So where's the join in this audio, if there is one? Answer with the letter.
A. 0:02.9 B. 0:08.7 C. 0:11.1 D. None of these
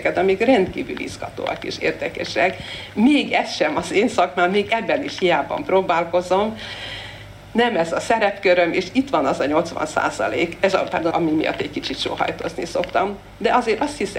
C